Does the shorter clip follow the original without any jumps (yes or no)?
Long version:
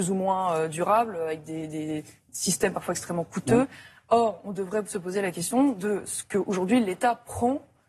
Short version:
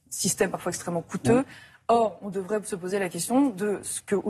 yes